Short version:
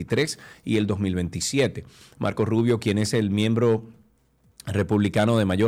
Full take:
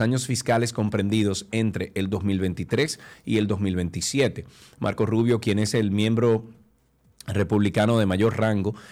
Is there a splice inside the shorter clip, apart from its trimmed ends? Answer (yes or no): no